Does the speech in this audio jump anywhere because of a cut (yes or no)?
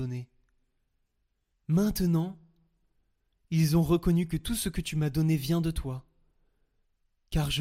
yes